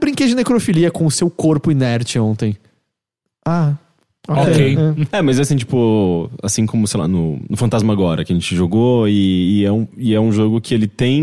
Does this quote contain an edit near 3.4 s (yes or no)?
no